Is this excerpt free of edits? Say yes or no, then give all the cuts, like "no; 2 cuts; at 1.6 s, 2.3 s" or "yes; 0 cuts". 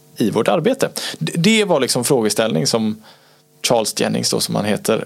yes; 0 cuts